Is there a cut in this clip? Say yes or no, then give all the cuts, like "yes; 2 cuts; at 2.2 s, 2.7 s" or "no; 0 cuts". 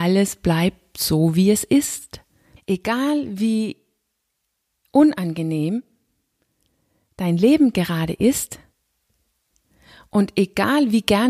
yes; 1 cut; at 2.6 s